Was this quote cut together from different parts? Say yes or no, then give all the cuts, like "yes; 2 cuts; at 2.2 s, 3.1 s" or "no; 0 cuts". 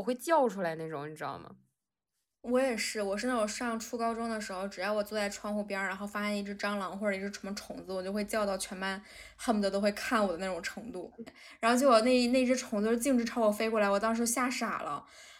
yes; 1 cut; at 11.3 s